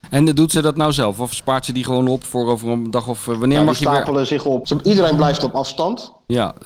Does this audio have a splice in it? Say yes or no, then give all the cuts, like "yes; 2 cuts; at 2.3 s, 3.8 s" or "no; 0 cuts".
yes; 1 cut; at 4.6 s